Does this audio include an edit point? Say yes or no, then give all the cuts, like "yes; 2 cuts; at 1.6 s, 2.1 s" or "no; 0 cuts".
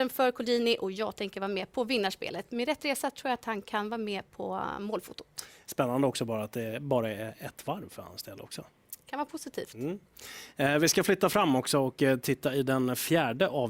no; 0 cuts